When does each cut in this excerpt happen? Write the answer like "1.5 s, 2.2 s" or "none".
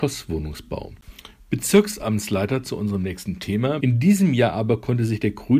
1.4 s, 3.8 s